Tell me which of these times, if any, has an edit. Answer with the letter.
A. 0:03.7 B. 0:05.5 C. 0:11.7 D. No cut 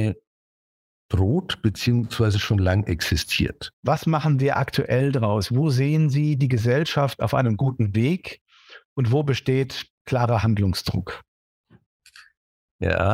A